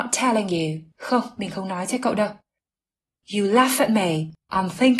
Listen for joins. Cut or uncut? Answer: cut